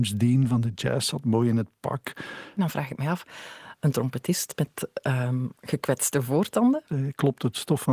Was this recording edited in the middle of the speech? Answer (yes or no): yes